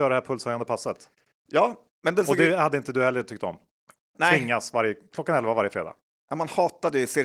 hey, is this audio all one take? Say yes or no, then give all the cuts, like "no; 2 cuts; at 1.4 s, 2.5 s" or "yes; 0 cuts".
yes; 0 cuts